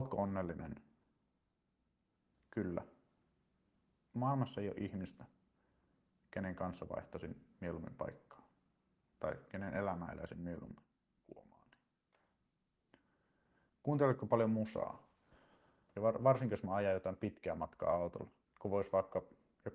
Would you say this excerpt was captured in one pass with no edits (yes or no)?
no